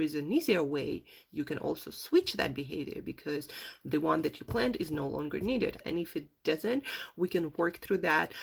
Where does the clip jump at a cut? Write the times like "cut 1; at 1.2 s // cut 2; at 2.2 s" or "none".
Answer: cut 1; at 5.8 s